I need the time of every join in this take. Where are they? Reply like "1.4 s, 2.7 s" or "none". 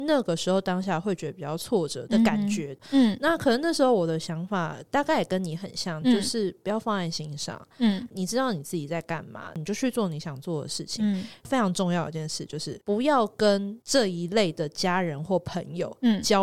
none